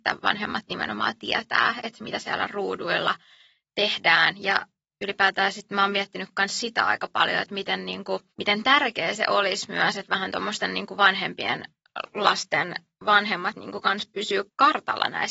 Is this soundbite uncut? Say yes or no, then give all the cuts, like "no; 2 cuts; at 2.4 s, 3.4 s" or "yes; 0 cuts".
yes; 0 cuts